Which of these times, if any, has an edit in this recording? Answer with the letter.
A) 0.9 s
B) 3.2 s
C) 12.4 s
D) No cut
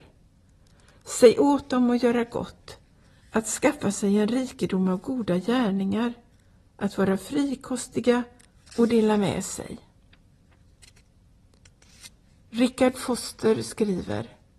D